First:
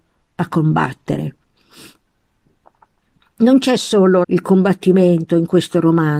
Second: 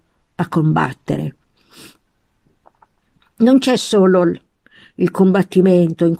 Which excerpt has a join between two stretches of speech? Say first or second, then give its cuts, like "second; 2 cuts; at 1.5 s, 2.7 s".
first; 1 cut; at 4.2 s